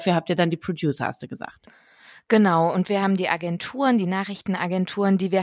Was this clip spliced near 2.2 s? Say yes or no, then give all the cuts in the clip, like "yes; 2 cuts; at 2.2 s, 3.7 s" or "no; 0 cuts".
no; 0 cuts